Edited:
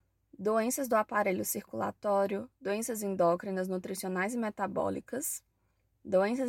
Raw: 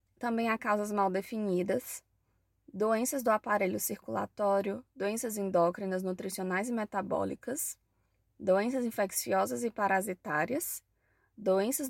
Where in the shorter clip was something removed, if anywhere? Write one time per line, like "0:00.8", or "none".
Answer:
none